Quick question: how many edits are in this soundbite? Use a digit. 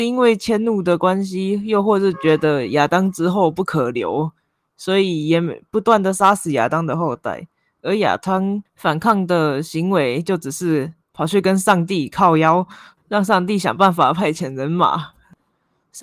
0